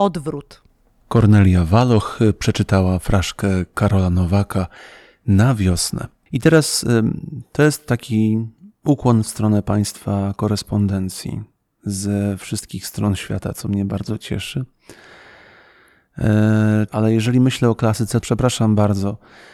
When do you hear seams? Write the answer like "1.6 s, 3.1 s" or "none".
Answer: 16.9 s, 18.2 s